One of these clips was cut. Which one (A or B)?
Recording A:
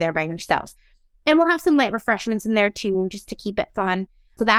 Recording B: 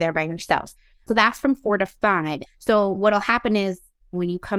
B